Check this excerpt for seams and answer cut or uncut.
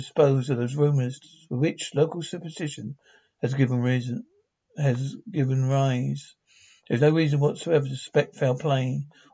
uncut